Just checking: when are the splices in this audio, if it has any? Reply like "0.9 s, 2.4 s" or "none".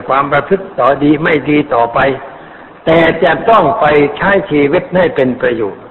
none